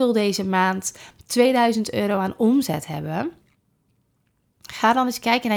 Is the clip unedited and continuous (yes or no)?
yes